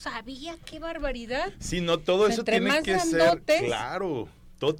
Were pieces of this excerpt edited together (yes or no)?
no